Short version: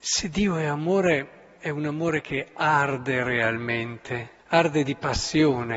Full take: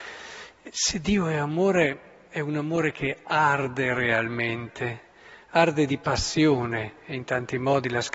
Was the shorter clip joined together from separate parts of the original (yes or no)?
yes